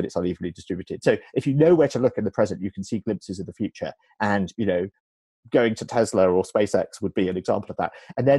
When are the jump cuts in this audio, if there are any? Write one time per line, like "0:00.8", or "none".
none